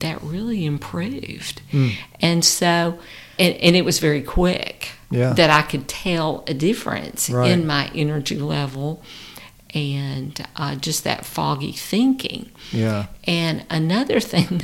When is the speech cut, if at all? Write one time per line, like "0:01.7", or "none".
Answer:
0:03.4